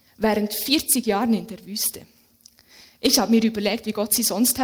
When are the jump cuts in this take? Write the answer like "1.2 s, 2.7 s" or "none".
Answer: none